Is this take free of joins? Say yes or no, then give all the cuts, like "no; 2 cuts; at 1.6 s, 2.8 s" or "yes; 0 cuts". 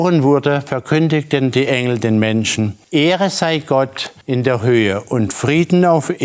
yes; 0 cuts